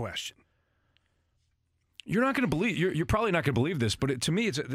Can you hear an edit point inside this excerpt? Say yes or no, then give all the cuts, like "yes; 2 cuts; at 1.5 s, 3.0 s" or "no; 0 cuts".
no; 0 cuts